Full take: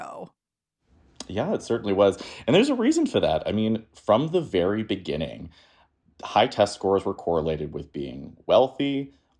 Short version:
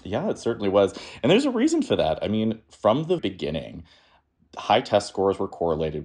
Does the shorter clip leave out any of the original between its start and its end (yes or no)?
yes